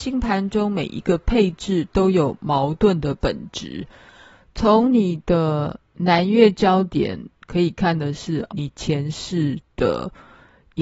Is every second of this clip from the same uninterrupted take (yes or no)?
no